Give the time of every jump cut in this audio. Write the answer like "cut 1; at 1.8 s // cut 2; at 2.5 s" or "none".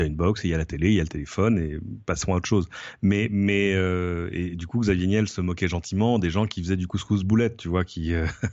none